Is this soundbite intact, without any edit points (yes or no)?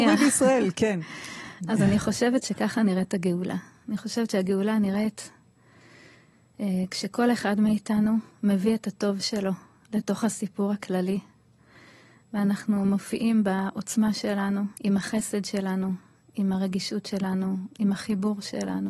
no